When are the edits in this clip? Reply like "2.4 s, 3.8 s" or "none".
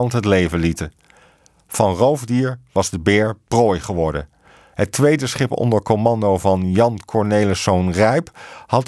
4.7 s

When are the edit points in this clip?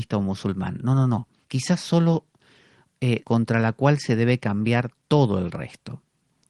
1.4 s, 3.2 s

